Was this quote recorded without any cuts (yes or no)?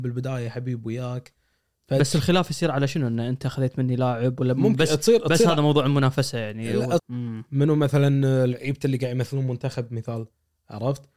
no